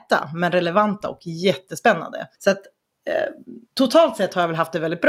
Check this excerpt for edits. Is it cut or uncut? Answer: cut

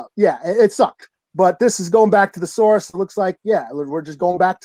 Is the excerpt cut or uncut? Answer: uncut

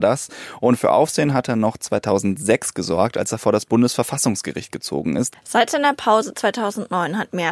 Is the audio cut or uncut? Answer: cut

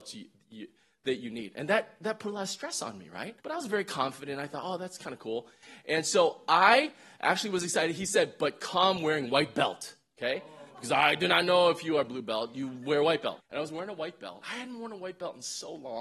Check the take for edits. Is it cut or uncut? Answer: cut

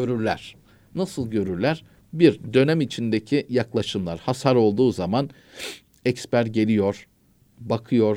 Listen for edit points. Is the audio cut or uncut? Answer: uncut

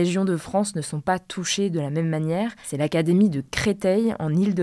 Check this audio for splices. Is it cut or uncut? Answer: uncut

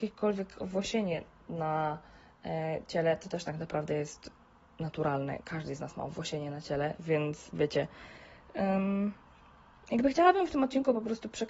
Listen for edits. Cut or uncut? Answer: uncut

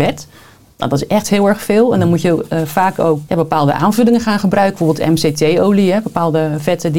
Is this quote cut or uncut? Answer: cut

